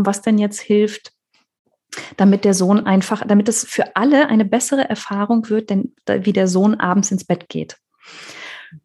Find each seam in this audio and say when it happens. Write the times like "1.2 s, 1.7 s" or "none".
none